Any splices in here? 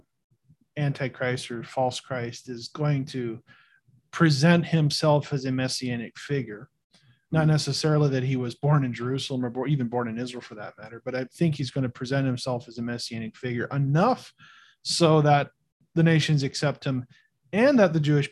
no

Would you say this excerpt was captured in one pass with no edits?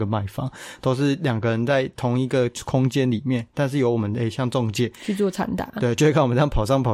yes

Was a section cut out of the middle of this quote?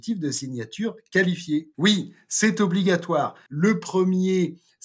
yes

